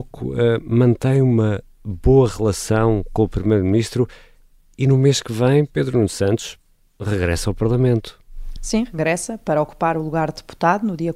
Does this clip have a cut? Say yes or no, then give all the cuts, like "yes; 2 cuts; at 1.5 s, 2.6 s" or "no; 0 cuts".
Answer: no; 0 cuts